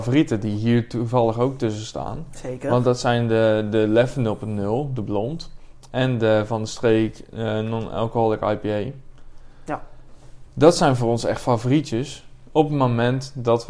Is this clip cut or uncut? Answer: uncut